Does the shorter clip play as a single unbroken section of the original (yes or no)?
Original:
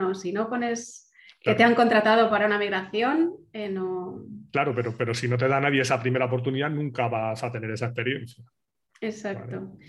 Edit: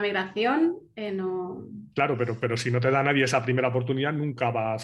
yes